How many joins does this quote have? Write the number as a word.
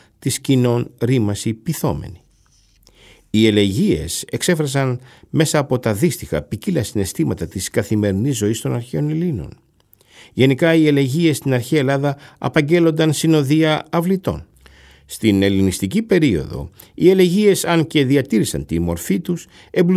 zero